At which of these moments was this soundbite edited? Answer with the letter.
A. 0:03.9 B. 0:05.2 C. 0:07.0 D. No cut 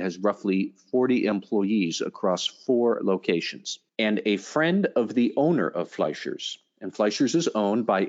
A